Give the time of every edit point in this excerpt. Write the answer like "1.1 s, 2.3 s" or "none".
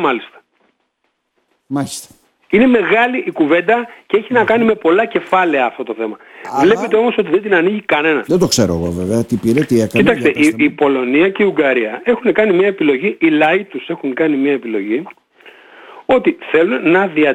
8.3 s